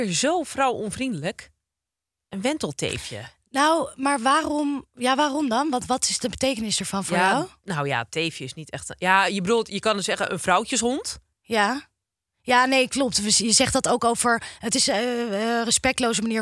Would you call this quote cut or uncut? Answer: uncut